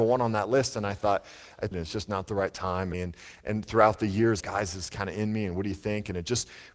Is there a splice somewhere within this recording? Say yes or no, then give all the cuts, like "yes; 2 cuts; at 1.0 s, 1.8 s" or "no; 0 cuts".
yes; 3 cuts; at 1.7 s, 2.9 s, 4.4 s